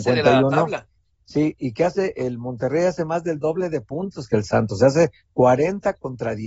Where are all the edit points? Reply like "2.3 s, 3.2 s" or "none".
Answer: none